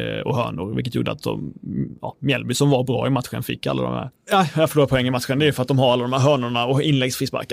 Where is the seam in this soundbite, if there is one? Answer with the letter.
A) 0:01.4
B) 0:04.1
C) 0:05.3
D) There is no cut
B